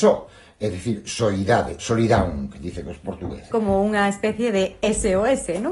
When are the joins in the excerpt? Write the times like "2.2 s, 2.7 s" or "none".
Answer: 1.8 s, 3.5 s